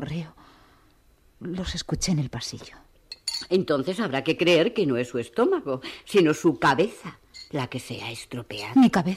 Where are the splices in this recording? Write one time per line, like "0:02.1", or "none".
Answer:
none